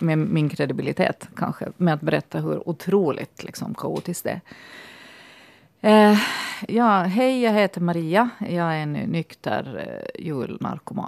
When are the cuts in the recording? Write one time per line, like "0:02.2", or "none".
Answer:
0:06.7